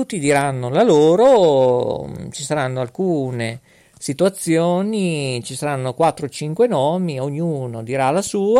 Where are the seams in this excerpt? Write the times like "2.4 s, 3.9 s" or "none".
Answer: none

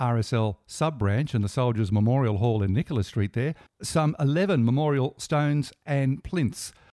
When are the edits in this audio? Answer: none

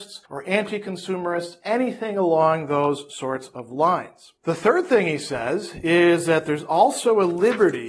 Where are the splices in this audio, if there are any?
4.4 s

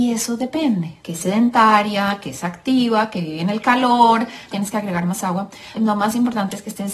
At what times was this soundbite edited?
1.0 s, 4.5 s, 5.7 s

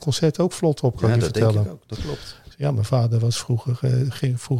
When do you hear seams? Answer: 2.5 s

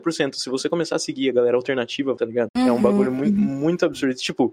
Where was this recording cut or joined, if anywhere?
2.2 s

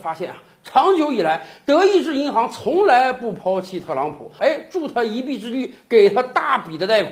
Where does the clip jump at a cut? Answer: 4.4 s

